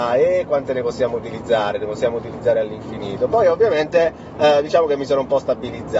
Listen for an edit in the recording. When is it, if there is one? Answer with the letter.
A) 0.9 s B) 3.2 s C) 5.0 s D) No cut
D